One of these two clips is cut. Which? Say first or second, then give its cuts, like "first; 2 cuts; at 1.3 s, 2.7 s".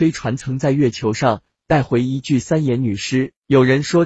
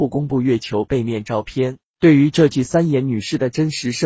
second; 1 cut; at 1.9 s